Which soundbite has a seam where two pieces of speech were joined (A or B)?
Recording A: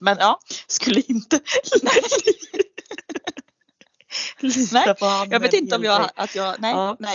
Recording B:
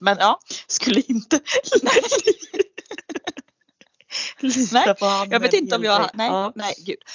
B